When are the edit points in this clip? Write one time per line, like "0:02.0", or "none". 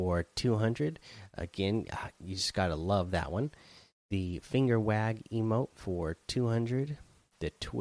none